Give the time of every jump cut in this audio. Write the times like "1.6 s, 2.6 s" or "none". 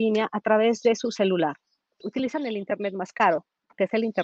2.0 s